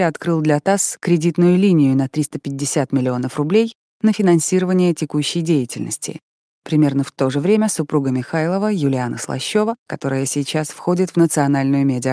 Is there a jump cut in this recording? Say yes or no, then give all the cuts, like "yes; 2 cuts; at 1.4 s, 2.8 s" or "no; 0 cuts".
yes; 1 cut; at 9.9 s